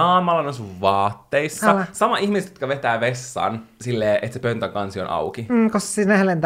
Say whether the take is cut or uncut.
uncut